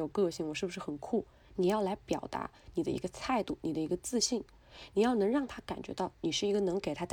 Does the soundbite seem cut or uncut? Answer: cut